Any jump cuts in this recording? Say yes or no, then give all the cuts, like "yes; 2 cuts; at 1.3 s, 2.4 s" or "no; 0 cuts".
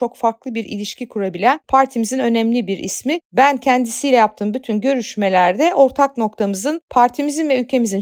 no; 0 cuts